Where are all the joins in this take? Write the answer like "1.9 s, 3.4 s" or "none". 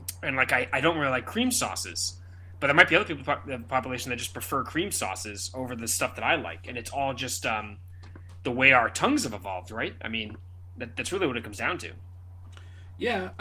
none